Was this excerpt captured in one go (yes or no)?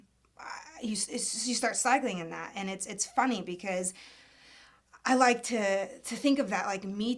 yes